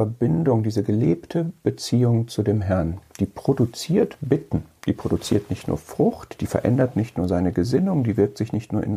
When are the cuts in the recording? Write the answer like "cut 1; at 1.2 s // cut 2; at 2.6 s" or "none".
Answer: none